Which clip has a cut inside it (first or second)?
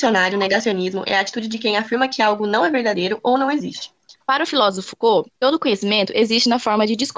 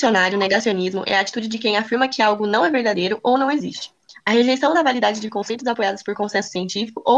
first